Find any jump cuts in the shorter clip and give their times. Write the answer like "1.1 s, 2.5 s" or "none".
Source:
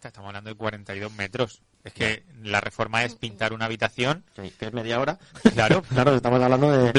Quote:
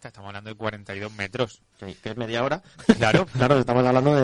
1.7 s